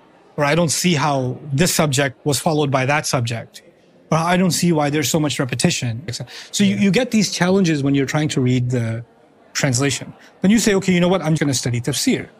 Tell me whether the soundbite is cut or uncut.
cut